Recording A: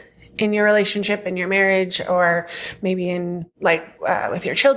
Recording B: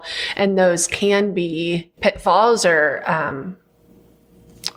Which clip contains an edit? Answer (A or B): B